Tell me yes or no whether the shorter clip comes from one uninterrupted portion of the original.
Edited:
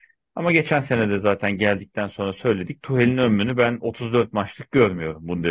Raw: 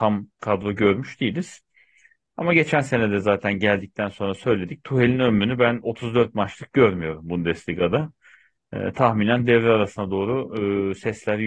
yes